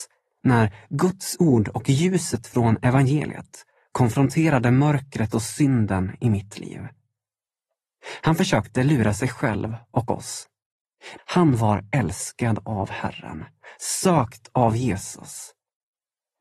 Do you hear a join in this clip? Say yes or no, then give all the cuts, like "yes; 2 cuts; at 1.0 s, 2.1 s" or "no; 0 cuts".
yes; 1 cut; at 11.2 s